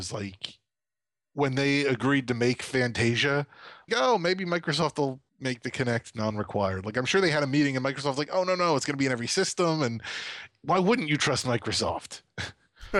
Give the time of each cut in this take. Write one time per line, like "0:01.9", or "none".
0:03.9
0:05.3